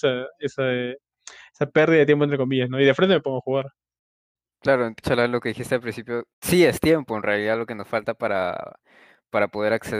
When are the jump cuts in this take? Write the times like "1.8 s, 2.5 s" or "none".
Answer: 5.0 s, 6.3 s